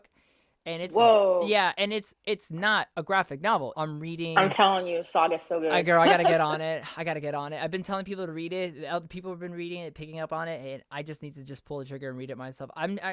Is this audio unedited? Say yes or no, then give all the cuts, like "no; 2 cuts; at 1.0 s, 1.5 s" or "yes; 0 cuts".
no; 1 cut; at 3.7 s